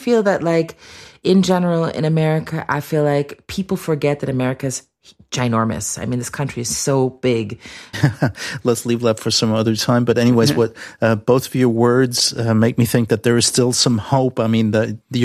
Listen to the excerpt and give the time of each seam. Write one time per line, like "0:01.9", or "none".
0:07.9